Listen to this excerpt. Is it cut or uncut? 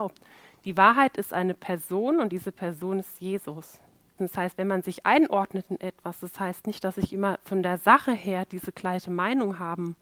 cut